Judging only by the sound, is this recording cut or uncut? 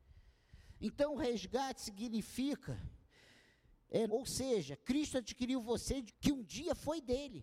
cut